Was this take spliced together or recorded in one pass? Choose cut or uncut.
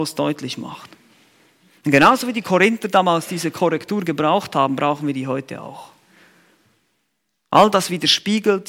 uncut